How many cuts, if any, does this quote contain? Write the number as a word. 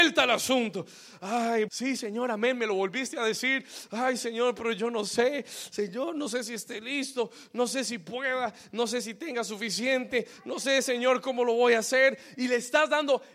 one